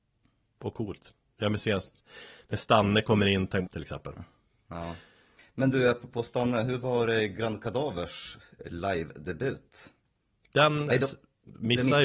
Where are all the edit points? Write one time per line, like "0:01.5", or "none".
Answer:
0:03.7
0:05.4